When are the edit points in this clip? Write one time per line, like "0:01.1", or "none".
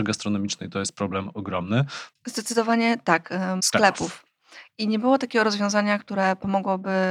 0:02.1
0:03.6